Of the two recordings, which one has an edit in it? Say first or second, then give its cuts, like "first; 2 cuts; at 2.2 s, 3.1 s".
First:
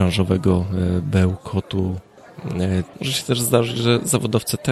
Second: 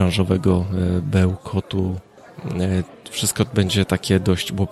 first; 1 cut; at 2.9 s